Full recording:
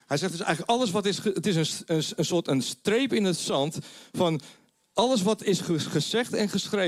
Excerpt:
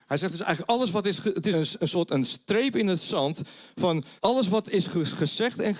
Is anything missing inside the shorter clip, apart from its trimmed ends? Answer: yes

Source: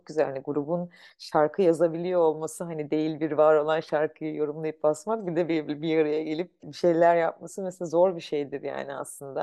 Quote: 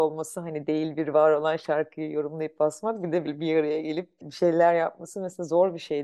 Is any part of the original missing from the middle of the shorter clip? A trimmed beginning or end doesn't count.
yes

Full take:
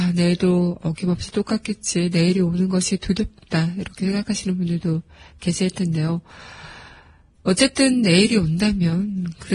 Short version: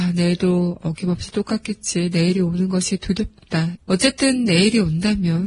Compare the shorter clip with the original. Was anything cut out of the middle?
yes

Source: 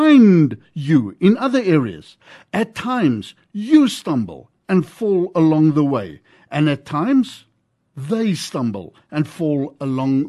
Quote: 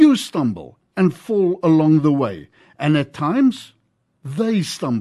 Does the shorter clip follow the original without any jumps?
yes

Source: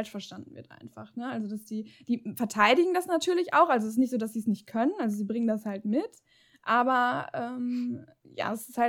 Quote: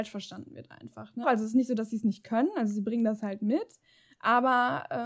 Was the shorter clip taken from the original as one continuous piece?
no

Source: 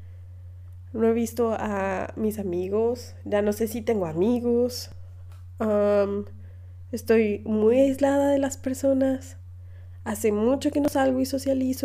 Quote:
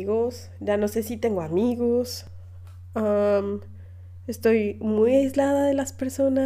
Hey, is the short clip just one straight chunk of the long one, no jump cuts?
yes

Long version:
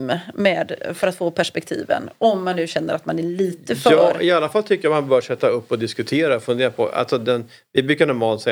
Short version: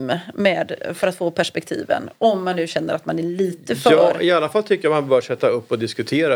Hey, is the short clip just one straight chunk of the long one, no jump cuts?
yes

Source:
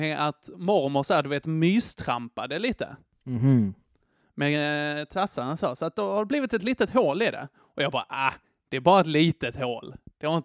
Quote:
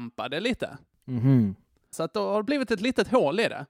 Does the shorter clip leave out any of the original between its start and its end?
yes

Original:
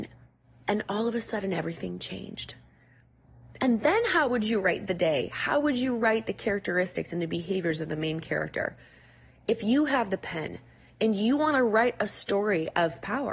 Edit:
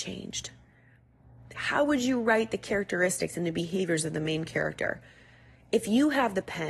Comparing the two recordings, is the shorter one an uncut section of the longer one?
no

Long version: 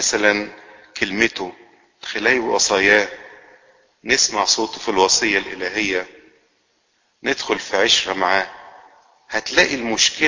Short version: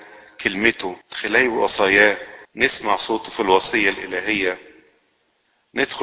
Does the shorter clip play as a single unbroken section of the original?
no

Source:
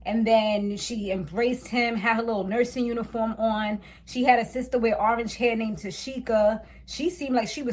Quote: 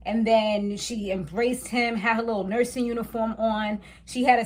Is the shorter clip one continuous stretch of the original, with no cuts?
yes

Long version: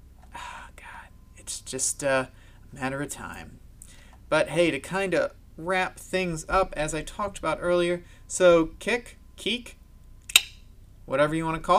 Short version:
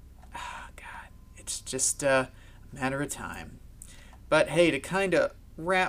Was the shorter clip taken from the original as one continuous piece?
yes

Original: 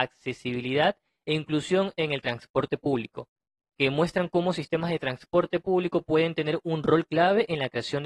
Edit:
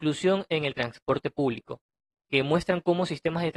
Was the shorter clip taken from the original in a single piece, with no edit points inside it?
yes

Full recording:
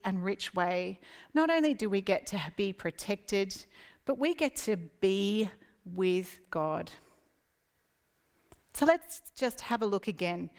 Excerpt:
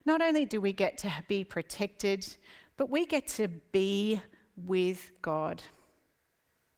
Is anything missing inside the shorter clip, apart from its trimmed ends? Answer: no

